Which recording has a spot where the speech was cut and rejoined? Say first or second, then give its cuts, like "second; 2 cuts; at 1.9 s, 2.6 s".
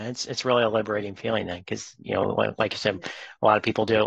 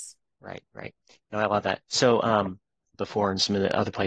second; 1 cut; at 2.9 s